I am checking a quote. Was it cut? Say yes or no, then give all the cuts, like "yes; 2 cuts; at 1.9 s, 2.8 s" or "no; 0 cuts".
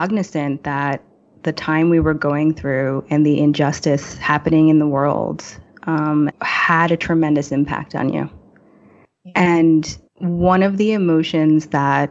yes; 2 cuts; at 6.3 s, 10.1 s